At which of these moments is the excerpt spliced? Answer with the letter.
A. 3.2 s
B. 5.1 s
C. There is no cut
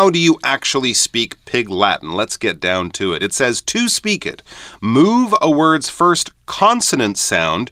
C